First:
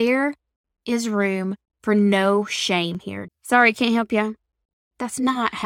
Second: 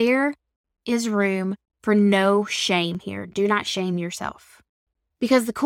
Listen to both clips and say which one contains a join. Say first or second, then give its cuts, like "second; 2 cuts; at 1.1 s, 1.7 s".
first; 1 cut; at 3.3 s